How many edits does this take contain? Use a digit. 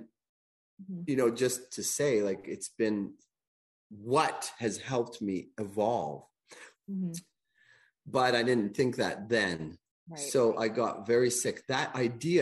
1